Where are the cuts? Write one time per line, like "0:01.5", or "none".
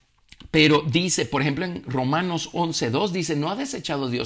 none